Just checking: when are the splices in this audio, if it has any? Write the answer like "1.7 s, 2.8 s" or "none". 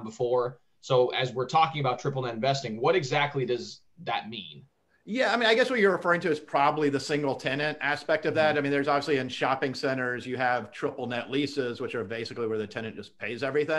none